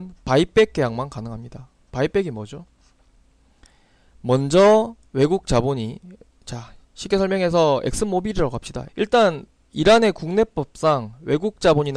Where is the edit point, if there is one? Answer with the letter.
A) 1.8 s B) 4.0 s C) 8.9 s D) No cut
C